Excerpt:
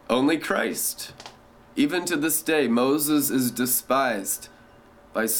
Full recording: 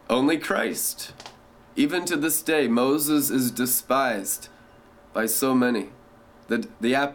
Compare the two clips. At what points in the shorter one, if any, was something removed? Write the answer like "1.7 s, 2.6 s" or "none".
none